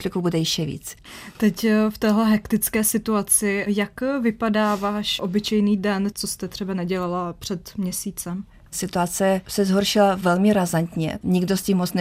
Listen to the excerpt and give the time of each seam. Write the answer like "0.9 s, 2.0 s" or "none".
6.1 s